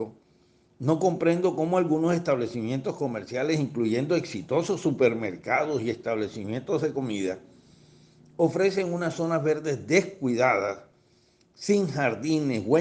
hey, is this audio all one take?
yes; 0 cuts

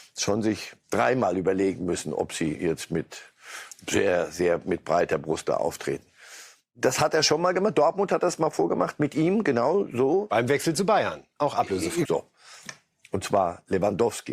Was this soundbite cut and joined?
yes; 1 cut; at 12.0 s

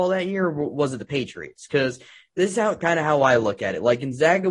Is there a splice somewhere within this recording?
no; 0 cuts

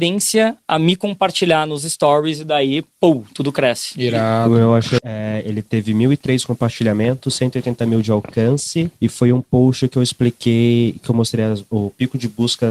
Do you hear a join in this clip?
yes; 1 cut; at 5.0 s

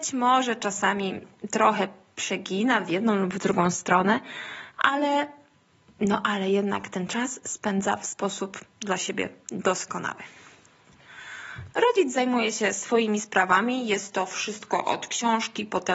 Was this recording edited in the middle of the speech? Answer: yes; 1 cut; at 11.7 s

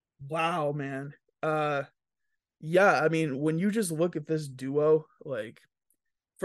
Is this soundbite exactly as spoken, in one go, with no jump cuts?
yes; 0 cuts

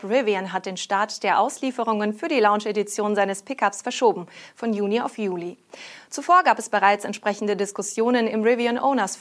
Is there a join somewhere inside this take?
no; 0 cuts

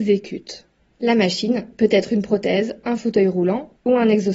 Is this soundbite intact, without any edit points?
yes; 0 cuts

